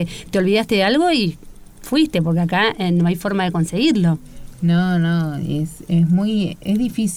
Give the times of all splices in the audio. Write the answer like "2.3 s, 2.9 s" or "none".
none